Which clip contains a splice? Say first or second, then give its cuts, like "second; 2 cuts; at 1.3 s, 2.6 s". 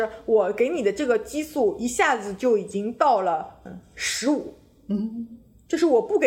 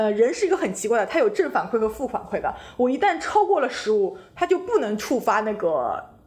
first; 1 cut; at 3.7 s